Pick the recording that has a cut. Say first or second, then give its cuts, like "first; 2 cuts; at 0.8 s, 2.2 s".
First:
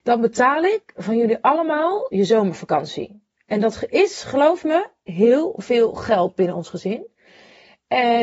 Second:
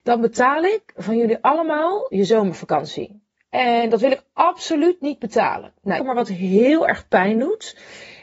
second; 2 cuts; at 3.4 s, 6.0 s